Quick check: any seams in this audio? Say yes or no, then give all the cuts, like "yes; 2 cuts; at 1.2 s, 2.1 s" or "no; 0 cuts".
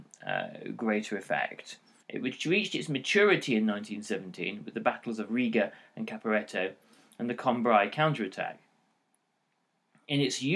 yes; 1 cut; at 2.0 s